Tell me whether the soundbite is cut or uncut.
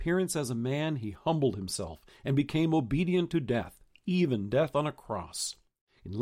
uncut